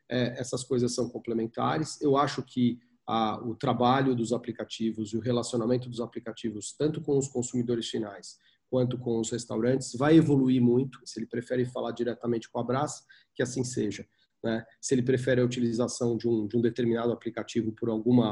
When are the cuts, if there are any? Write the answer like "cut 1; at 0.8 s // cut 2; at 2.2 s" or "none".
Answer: cut 1; at 11.0 s